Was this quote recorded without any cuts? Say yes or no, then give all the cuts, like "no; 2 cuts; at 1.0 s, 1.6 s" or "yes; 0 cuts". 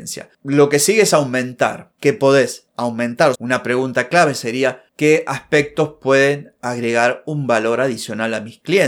no; 1 cut; at 3.3 s